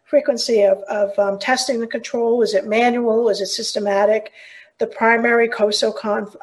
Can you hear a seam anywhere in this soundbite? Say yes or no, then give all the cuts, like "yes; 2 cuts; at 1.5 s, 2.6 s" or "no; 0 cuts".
no; 0 cuts